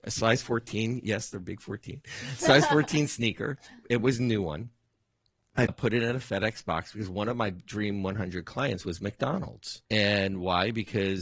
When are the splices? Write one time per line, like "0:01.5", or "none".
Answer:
0:09.9